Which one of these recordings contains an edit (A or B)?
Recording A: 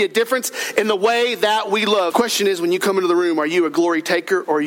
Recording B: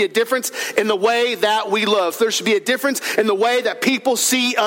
A